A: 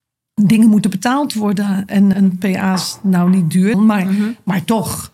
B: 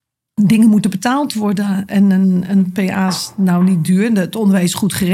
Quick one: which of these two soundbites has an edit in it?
A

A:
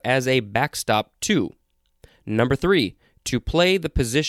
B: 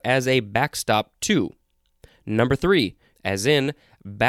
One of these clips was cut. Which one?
B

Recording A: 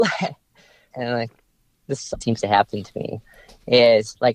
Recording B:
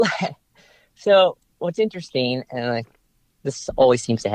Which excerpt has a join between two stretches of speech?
A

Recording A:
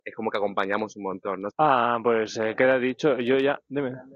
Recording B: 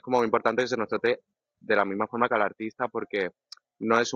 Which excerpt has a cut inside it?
A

